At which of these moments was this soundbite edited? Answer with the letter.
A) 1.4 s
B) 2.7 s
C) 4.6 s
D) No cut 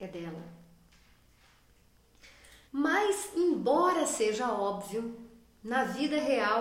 B